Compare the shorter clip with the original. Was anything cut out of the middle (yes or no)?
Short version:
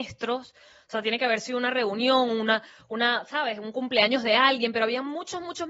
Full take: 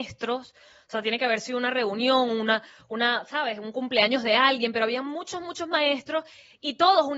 no